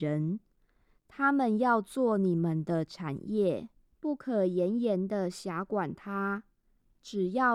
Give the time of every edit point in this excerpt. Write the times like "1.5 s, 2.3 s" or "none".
3.9 s

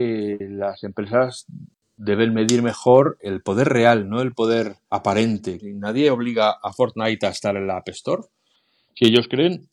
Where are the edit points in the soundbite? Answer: 5.6 s

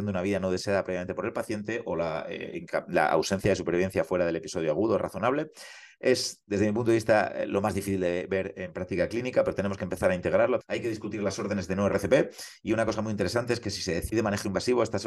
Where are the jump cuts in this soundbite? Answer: 10.6 s

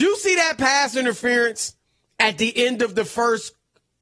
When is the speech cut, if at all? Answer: none

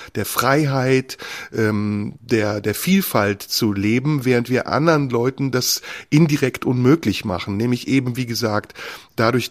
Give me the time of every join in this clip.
none

